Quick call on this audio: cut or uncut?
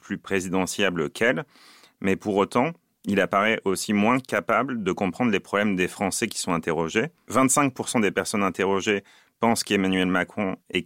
uncut